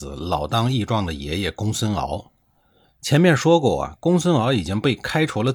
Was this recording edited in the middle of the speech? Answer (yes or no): no